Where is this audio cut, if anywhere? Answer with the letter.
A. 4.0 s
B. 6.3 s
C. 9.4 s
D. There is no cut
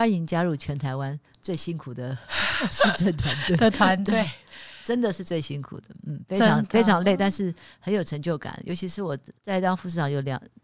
C